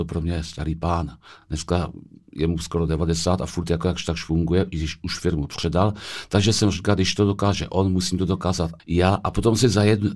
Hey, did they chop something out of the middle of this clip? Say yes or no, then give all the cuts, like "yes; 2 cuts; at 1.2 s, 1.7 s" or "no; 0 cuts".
no; 0 cuts